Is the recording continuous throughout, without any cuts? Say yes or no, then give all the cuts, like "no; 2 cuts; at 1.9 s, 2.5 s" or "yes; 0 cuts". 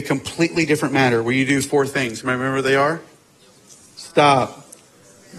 yes; 0 cuts